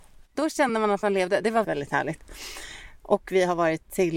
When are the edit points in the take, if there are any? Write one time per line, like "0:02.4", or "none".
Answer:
0:01.6